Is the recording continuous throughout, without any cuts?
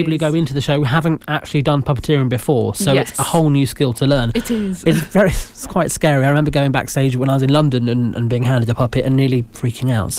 yes; 0 cuts

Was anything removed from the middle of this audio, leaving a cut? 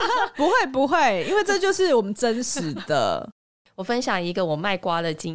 no; 0 cuts

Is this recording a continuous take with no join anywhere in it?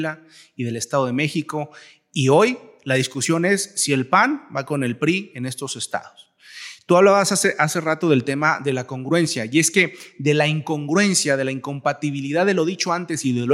yes; 0 cuts

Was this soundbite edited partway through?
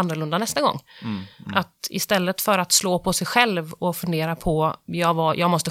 no; 0 cuts

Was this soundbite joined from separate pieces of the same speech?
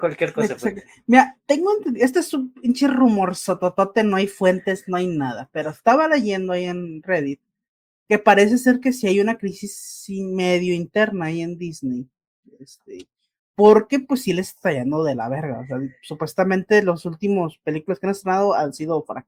no; 0 cuts

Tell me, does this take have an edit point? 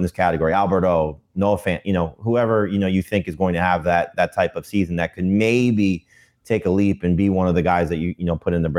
no; 0 cuts

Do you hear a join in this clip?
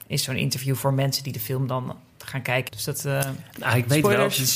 yes; 1 cut; at 2.7 s

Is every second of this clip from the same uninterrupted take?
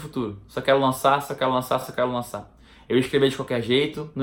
yes; 0 cuts

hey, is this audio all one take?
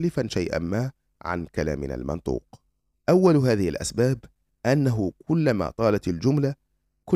no; 1 cut; at 2.9 s

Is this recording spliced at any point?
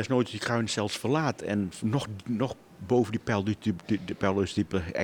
no; 0 cuts

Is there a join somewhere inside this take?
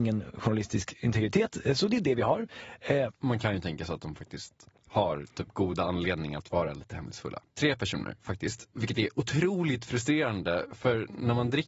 yes; 2 cuts; at 3.1 s, 7.4 s

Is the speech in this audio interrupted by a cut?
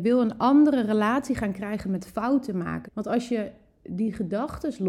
yes; 1 cut; at 2.8 s

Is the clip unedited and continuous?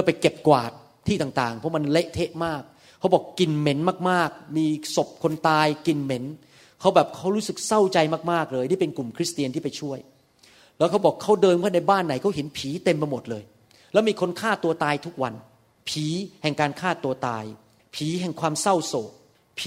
yes; 0 cuts

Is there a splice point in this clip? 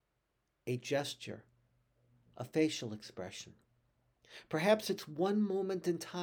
no; 0 cuts

